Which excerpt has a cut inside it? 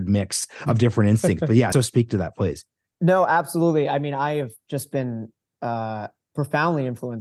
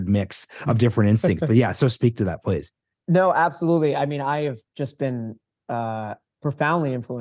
first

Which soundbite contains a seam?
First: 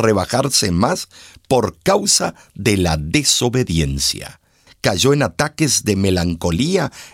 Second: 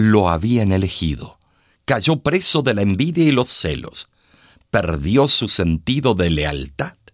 first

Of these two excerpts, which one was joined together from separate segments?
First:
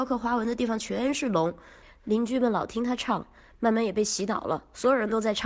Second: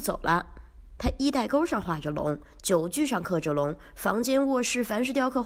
second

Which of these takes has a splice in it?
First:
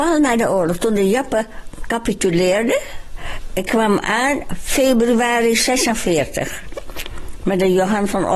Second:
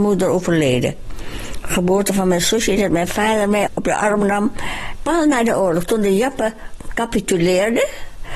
second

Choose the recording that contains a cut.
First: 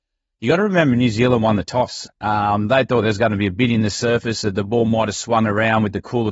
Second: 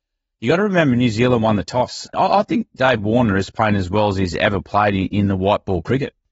second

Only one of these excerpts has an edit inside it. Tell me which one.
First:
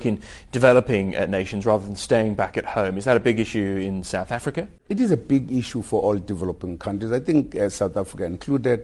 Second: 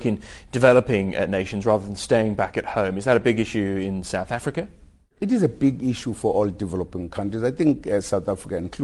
first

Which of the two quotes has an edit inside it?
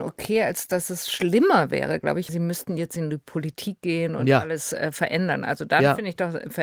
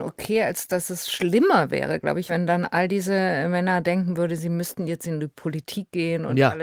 first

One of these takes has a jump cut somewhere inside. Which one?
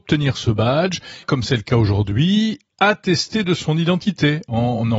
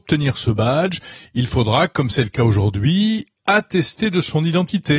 first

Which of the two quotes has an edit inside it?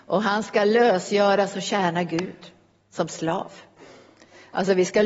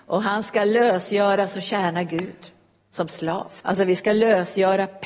second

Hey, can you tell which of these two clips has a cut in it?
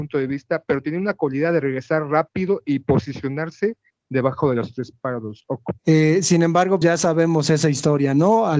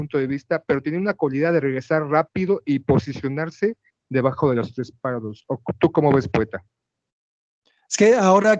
first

